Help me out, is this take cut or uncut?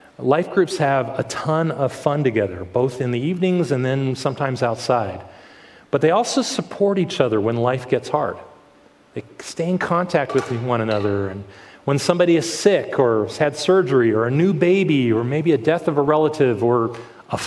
uncut